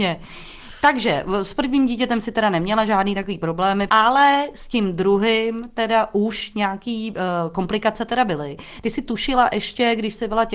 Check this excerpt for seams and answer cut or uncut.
uncut